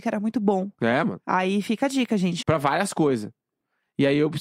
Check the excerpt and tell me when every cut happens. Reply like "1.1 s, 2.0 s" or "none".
1.0 s, 2.4 s